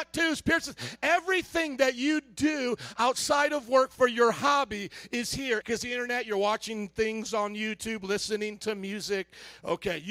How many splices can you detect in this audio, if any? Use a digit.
1